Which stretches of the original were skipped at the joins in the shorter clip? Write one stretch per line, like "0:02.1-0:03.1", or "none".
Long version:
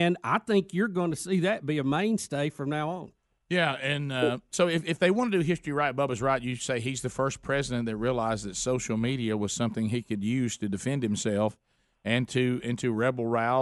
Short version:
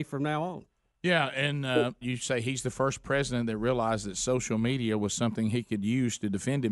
0:04.5-0:06.4